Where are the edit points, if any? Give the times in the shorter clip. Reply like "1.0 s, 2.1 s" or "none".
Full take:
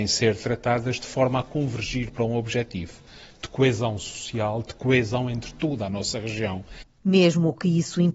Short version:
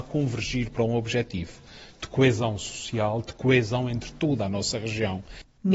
none